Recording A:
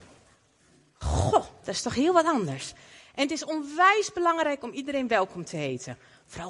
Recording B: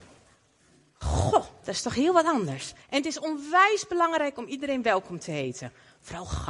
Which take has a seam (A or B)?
B